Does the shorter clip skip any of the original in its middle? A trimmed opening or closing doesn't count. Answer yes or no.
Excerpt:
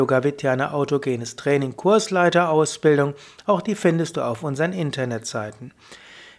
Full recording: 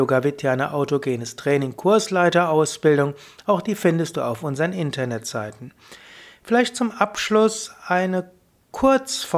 no